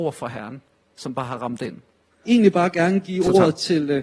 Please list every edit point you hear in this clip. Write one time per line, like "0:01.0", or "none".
0:02.2